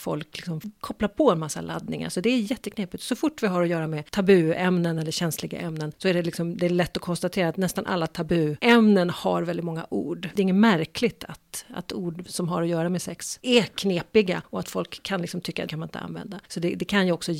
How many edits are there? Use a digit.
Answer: 2